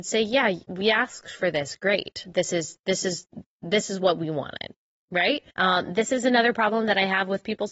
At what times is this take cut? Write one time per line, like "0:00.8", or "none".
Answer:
0:05.5